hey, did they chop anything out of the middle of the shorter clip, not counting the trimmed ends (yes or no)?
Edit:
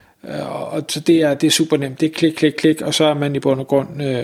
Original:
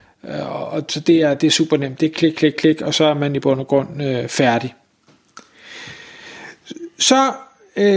no